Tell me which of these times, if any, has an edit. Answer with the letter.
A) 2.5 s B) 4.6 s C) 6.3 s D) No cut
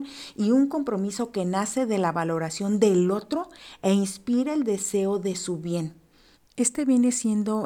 C